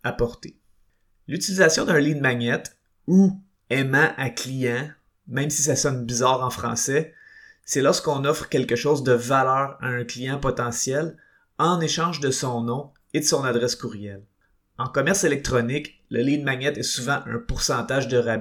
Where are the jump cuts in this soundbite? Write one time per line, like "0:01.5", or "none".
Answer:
none